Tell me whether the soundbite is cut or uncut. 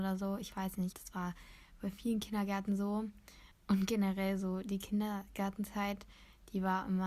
cut